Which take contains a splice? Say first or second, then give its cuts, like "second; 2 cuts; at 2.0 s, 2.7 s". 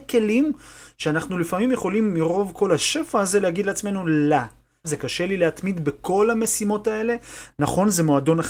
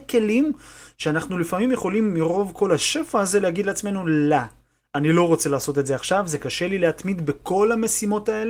first; 1 cut; at 4.8 s